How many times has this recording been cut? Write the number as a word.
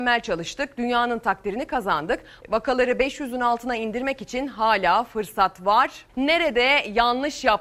two